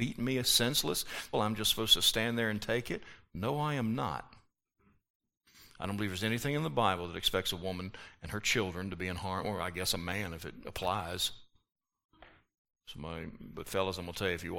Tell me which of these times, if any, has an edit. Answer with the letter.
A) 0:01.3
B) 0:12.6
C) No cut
A